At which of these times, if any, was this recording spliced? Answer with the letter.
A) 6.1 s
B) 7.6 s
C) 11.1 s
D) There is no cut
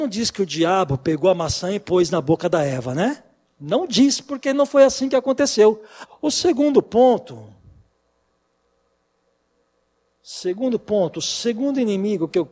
A